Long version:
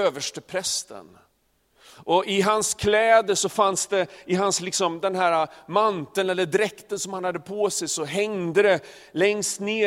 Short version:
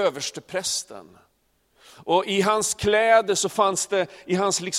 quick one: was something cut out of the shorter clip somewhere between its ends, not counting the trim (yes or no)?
no